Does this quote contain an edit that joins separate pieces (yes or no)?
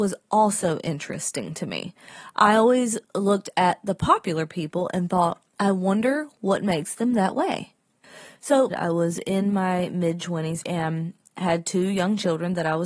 yes